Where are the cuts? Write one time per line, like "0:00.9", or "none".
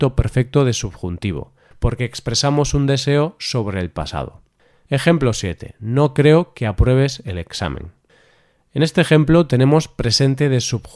none

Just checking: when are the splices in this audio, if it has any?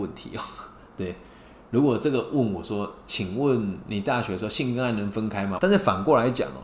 0:05.6

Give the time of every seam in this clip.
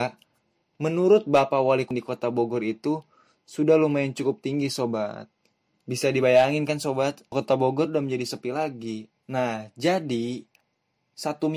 0:07.3
0:09.1

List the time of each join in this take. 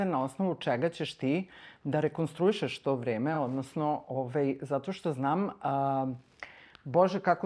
none

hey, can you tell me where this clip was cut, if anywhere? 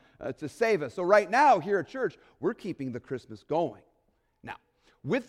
none

